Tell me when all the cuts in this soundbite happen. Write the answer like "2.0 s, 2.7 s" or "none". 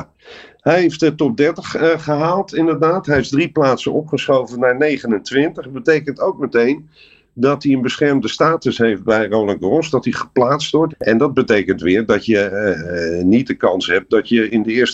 10.9 s